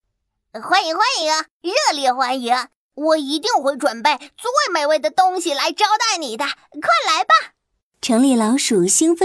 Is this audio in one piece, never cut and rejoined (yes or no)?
yes